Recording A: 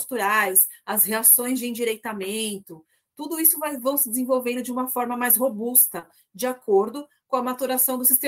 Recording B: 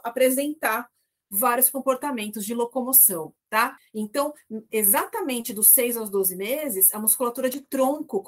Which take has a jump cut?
B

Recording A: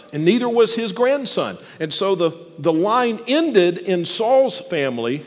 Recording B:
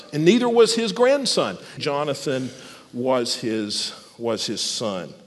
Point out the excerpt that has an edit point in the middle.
B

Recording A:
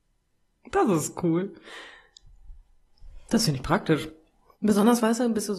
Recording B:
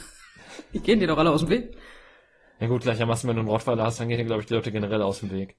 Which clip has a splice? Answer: A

